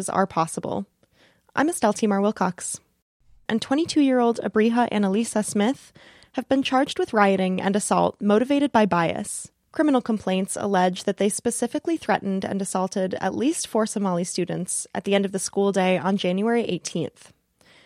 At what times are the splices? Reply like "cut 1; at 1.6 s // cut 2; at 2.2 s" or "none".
cut 1; at 3.5 s